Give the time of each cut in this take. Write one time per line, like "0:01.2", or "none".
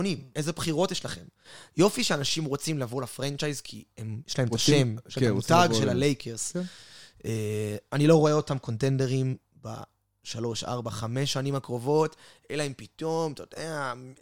none